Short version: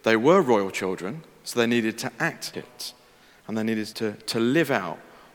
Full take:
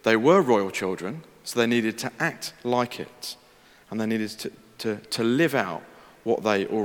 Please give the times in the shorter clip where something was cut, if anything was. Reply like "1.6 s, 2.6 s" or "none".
2.5 s, 3.9 s